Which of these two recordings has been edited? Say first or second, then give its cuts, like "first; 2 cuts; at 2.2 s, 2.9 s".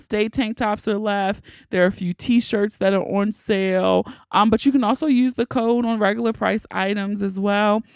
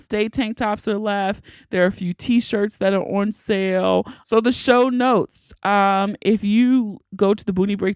second; 1 cut; at 4.2 s